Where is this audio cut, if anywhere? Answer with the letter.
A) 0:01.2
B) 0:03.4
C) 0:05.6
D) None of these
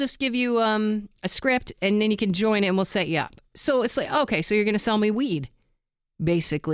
D